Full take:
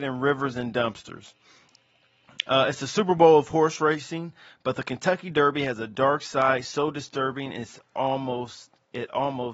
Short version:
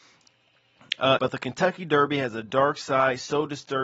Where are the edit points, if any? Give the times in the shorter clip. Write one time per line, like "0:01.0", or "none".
0:01.2